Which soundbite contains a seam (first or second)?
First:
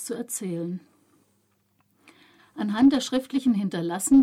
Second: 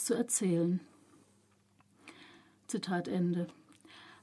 first